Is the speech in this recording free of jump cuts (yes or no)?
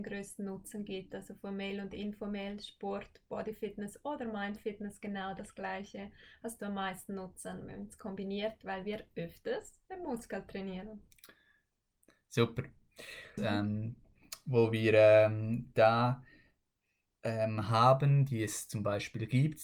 no